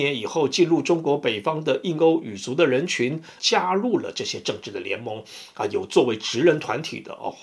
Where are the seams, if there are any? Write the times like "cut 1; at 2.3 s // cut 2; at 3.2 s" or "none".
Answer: cut 1; at 3.4 s